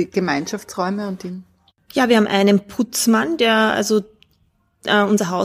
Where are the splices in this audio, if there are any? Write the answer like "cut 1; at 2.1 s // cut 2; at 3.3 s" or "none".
none